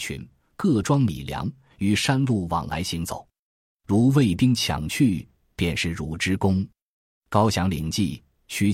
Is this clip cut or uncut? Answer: uncut